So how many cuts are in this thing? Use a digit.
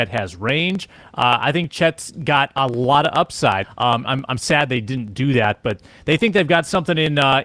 1